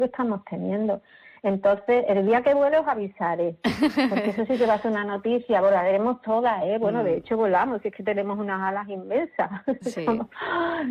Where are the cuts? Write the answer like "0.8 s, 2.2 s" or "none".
none